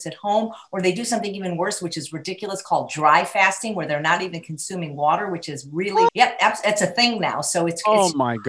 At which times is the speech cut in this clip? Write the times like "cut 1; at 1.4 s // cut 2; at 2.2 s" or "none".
cut 1; at 6.1 s